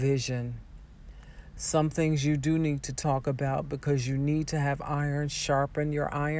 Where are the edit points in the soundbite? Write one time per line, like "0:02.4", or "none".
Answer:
none